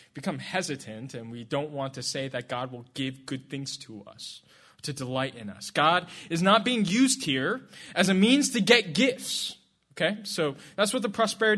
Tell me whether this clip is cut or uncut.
uncut